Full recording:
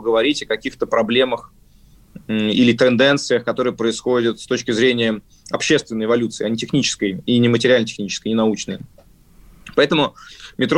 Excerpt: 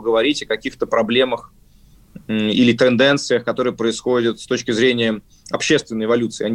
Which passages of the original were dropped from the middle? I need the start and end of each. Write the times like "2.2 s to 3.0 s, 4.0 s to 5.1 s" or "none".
none